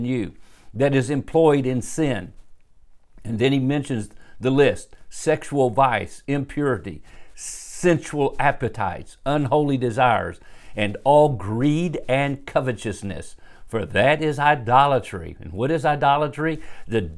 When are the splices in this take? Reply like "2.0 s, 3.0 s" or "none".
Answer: none